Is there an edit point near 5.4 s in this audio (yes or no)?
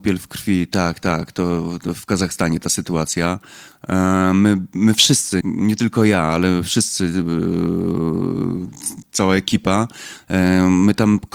yes